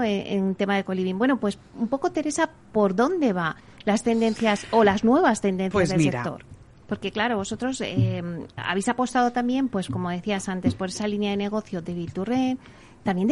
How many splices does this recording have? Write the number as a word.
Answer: two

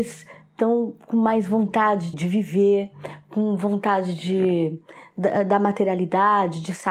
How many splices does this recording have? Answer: one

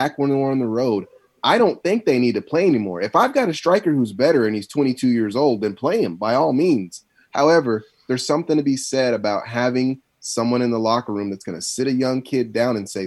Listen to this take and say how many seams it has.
zero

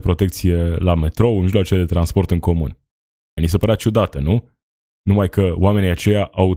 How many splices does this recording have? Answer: one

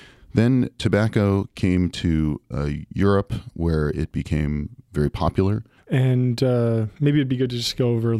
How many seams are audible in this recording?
one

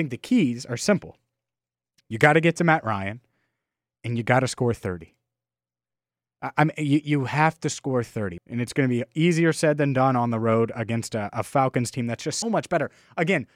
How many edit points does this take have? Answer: two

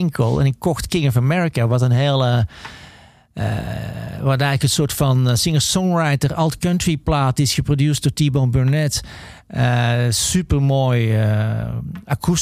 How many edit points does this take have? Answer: zero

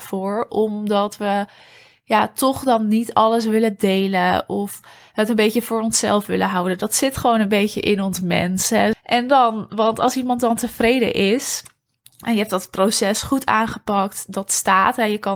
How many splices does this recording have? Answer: one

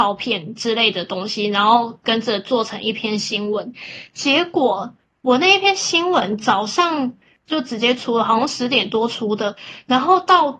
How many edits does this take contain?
zero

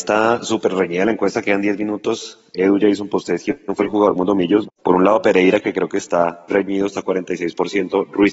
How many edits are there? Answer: two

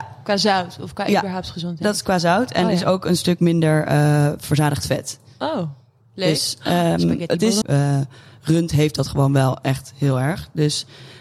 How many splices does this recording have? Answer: one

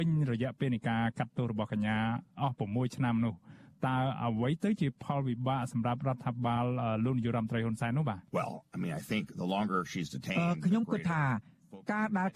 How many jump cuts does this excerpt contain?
zero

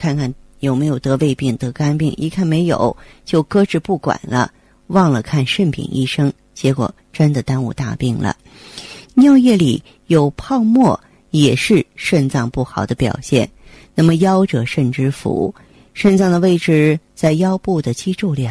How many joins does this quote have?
zero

